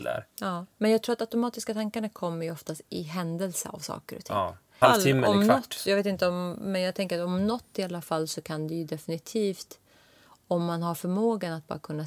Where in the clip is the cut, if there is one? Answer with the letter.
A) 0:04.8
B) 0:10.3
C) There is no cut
A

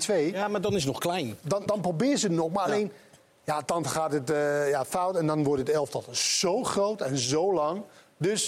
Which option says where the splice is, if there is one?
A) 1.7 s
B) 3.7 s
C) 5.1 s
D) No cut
A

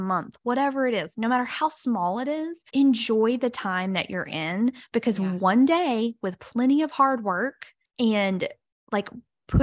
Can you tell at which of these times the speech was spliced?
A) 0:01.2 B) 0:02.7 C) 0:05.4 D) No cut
B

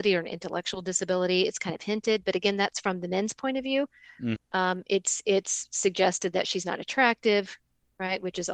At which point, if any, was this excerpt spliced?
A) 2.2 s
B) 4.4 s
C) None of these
B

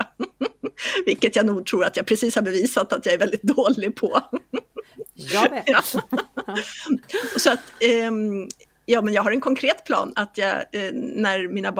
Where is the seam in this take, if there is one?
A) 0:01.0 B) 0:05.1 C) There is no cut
C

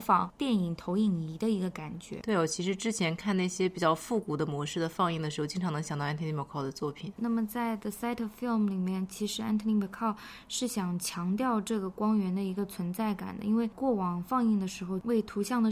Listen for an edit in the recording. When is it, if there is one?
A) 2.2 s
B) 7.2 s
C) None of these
B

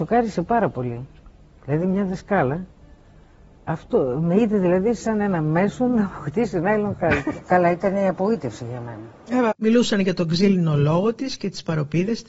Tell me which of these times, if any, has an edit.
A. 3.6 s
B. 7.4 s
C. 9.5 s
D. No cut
C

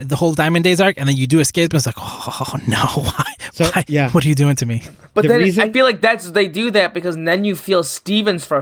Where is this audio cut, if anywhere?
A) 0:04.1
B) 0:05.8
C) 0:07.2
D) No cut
D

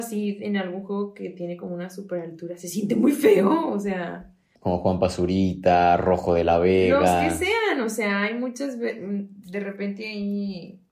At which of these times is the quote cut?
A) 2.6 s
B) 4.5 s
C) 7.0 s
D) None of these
B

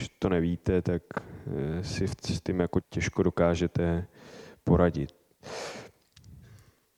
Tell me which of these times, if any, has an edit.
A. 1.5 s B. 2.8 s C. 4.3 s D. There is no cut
B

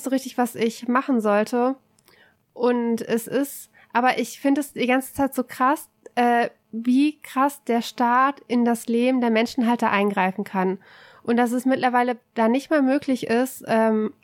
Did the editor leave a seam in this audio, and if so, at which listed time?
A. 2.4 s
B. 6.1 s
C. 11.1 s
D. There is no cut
D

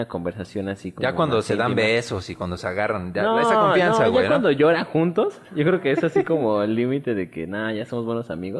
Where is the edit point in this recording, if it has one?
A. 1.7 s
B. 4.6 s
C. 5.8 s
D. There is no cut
D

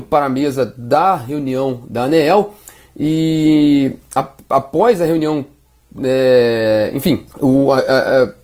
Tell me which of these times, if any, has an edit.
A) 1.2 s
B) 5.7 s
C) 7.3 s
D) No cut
C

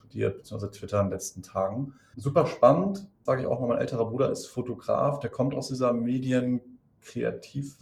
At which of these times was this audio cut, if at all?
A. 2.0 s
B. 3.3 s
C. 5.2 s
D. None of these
B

